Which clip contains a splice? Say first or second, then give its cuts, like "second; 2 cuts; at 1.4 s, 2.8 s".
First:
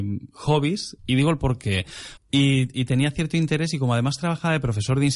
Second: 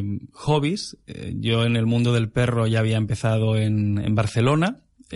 first; 2 cuts; at 1.0 s, 2.2 s